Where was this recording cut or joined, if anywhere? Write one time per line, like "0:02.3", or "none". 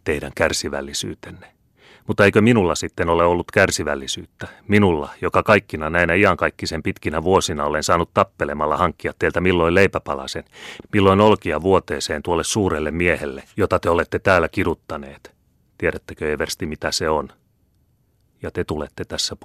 0:10.8
0:15.6